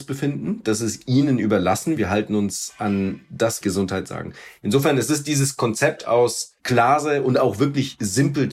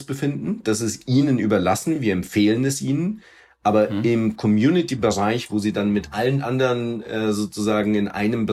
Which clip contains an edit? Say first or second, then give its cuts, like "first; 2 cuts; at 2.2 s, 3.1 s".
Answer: first; 3 cuts; at 2.0 s, 3.6 s, 6.6 s